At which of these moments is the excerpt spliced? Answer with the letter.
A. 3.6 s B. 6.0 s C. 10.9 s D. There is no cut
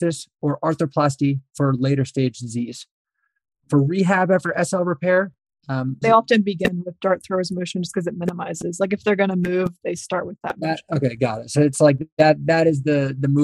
B